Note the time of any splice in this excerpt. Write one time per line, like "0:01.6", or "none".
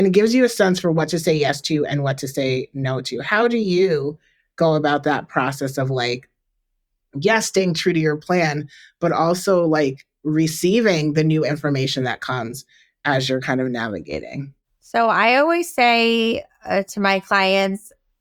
none